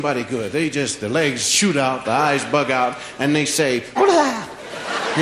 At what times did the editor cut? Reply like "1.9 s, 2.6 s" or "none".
2.0 s, 4.0 s